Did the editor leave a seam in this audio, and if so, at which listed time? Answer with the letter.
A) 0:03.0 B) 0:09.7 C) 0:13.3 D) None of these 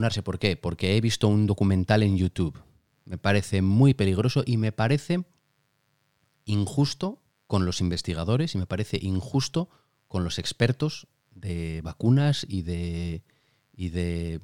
D